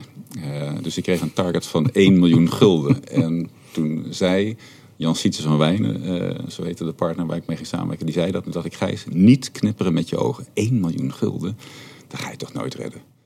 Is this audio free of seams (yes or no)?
yes